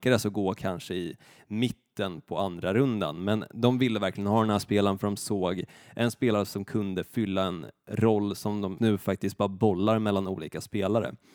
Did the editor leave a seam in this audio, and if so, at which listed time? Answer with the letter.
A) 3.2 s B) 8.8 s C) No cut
B